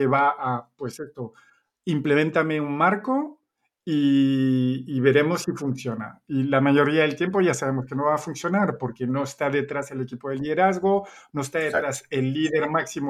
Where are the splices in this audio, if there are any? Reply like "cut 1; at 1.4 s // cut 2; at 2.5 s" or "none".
none